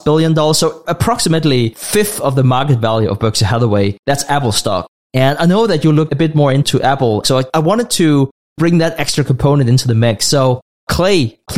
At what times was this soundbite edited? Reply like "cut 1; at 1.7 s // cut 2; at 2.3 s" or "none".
cut 1; at 7.2 s